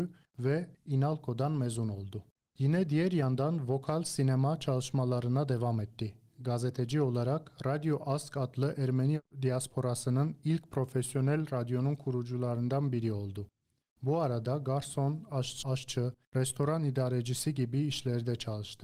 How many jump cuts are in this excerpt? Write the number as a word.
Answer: one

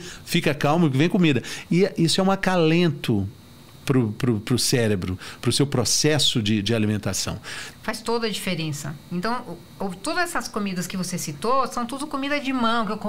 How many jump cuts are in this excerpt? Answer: one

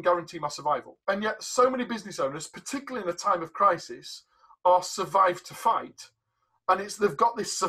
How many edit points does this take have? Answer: one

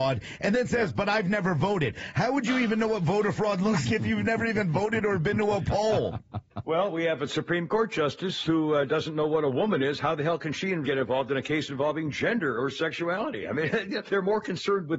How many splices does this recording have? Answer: three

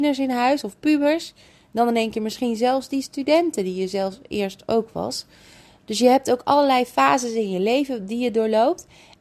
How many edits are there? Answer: zero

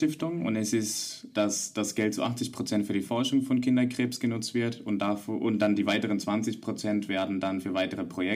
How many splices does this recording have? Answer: one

